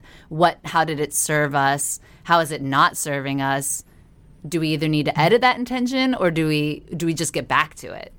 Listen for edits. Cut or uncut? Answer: uncut